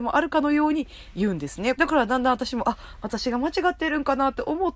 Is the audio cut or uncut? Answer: cut